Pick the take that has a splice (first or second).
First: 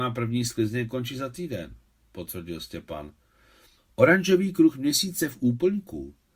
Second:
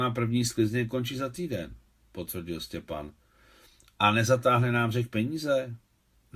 first